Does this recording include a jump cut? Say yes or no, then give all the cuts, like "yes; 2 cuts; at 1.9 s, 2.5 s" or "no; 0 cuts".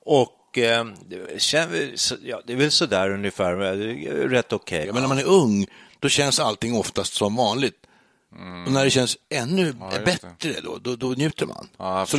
yes; 1 cut; at 4.8 s